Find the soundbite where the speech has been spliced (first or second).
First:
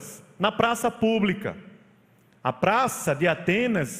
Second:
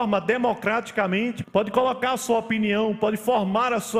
second